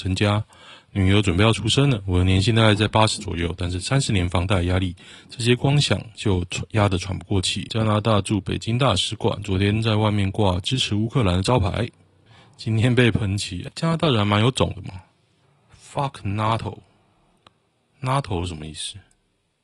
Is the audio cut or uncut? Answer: cut